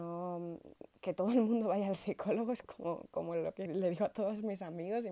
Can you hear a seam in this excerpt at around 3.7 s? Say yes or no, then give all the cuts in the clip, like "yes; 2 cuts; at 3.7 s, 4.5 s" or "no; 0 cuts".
yes; 2 cuts; at 2.6 s, 3.7 s